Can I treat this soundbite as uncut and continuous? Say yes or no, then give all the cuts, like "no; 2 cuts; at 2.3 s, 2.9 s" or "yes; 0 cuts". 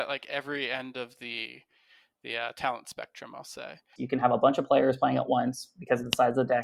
no; 1 cut; at 4.0 s